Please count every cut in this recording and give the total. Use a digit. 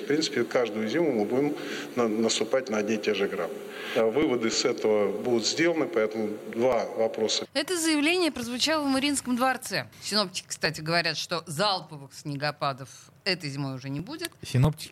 2